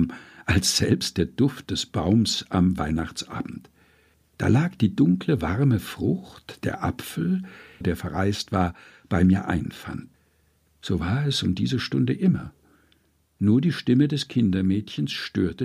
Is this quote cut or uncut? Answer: cut